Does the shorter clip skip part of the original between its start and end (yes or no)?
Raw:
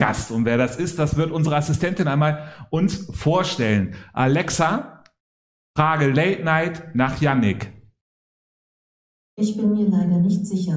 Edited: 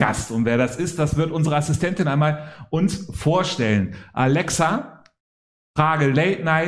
no